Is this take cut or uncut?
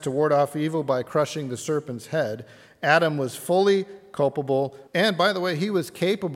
cut